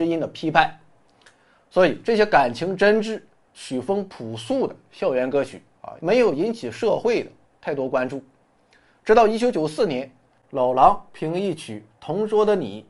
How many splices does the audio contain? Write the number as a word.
one